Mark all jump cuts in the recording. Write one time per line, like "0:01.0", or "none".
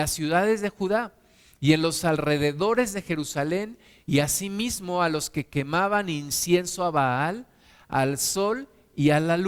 none